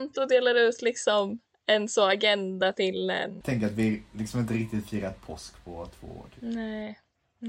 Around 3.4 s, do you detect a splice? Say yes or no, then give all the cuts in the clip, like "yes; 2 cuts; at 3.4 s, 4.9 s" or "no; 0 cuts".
yes; 1 cut; at 3.4 s